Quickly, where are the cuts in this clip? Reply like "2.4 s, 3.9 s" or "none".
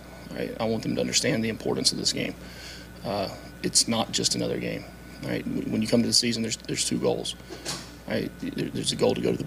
none